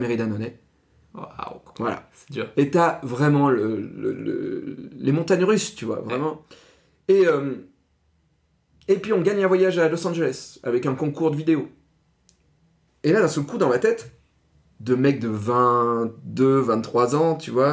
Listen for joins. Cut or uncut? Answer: uncut